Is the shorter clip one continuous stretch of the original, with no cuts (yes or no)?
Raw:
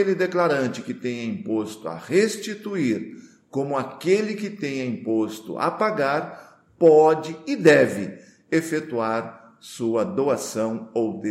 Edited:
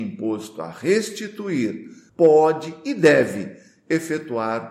no